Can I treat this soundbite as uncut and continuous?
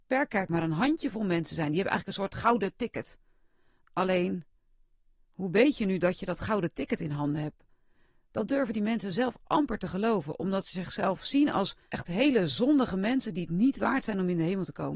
yes; 0 cuts

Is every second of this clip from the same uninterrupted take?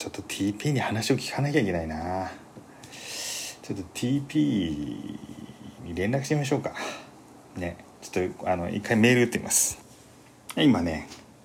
no; 1 cut; at 7.9 s

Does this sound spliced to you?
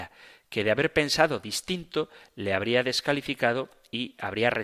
no; 0 cuts

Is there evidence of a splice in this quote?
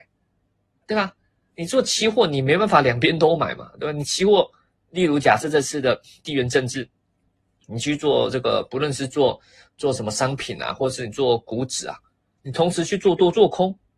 no; 0 cuts

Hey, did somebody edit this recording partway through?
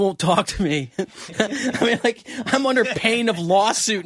no; 0 cuts

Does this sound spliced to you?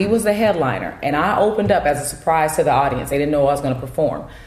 no; 0 cuts

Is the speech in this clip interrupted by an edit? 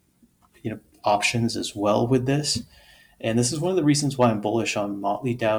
no; 0 cuts

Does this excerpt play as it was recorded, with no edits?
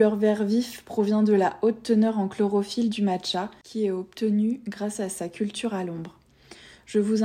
yes; 0 cuts

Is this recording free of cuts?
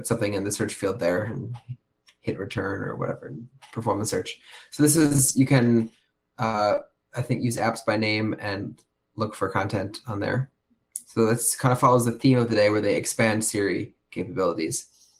yes; 0 cuts

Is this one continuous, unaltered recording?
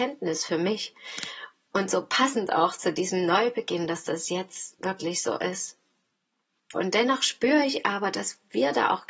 no; 1 cut; at 6.7 s

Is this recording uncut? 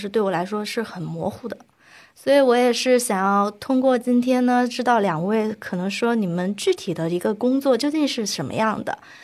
yes; 0 cuts

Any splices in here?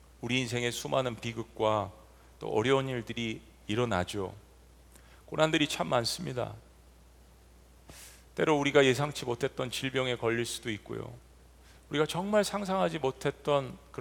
no; 0 cuts

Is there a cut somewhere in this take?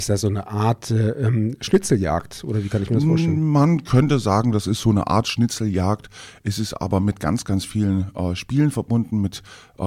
no; 0 cuts

